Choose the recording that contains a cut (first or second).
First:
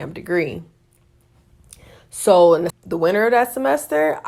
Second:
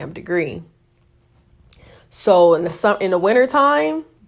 first